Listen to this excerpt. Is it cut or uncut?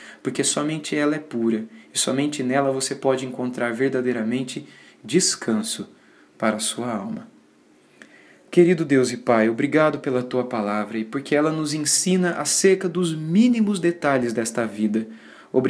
uncut